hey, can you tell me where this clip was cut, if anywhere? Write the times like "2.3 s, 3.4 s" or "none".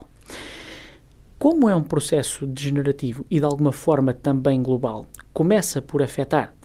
none